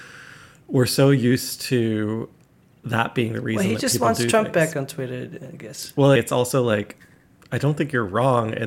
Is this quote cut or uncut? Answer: cut